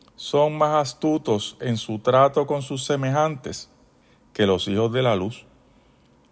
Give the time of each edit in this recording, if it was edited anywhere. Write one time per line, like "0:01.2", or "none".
none